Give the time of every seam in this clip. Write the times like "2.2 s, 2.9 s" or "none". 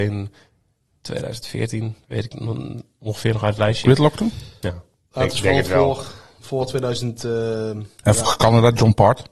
8.2 s